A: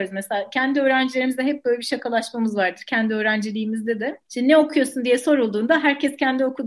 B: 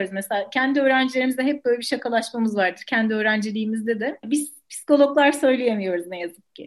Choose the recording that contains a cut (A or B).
B